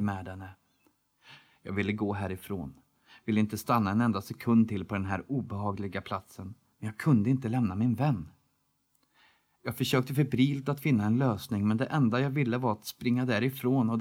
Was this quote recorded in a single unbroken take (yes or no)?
yes